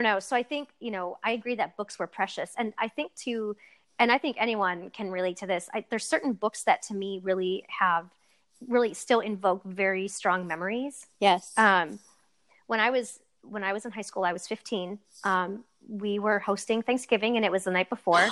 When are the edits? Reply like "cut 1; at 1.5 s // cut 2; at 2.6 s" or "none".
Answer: none